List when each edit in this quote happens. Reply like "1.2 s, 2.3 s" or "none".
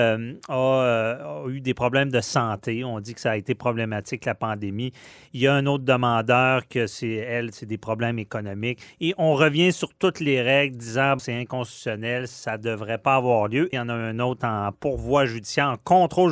11.2 s, 13.7 s